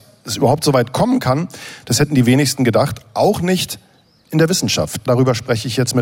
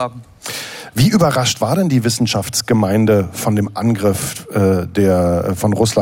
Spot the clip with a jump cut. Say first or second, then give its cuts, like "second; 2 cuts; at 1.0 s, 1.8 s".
first; 1 cut; at 5.1 s